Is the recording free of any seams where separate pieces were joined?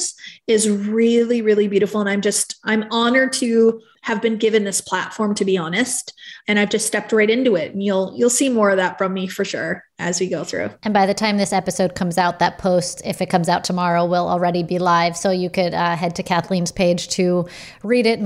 yes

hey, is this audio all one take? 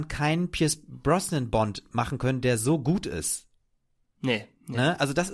yes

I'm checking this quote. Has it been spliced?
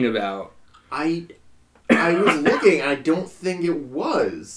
no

